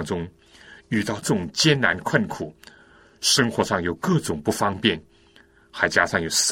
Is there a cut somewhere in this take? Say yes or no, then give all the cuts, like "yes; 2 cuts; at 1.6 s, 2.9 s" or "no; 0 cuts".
yes; 1 cut; at 1.2 s